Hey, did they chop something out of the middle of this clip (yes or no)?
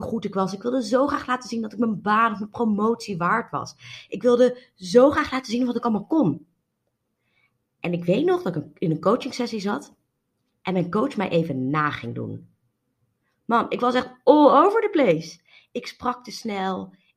no